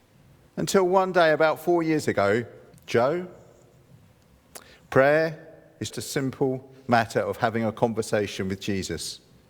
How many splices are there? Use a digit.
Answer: 2